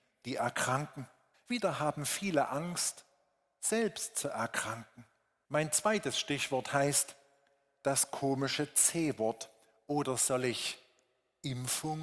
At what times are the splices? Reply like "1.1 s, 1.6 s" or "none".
1.3 s, 5.4 s